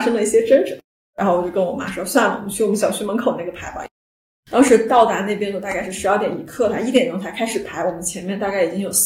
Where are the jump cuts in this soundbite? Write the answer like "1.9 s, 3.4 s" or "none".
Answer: none